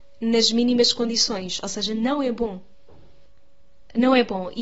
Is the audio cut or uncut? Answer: uncut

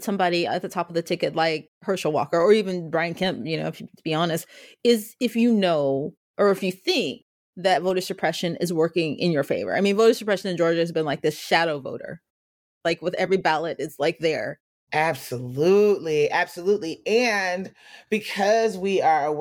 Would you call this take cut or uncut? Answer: uncut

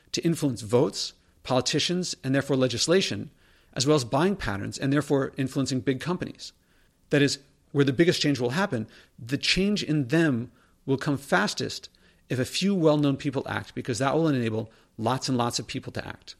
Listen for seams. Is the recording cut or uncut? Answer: cut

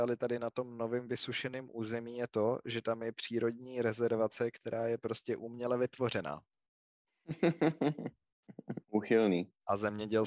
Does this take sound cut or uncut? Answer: cut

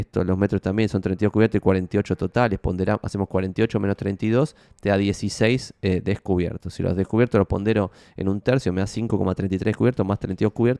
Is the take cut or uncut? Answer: uncut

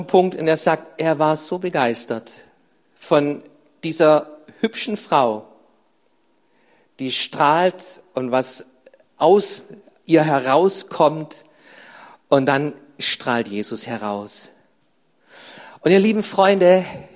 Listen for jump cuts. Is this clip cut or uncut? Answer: uncut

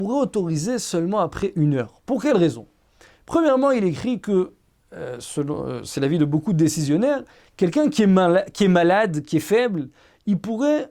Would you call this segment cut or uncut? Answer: uncut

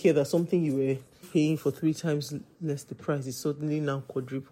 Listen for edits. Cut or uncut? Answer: cut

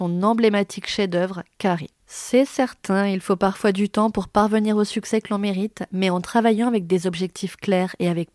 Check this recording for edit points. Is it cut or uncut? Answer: uncut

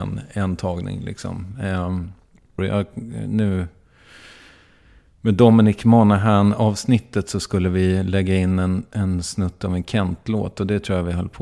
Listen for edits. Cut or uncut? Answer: cut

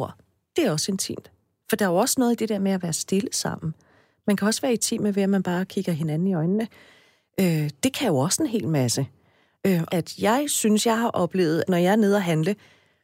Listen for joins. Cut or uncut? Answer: cut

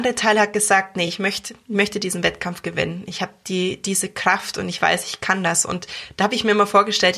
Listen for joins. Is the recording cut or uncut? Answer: uncut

